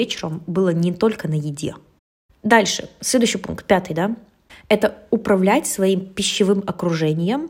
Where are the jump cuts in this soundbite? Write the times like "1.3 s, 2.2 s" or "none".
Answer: none

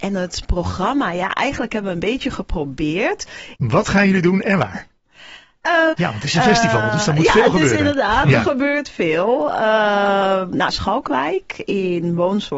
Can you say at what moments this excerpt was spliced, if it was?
3.6 s, 5.9 s, 10.7 s

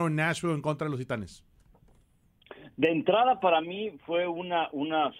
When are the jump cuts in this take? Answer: none

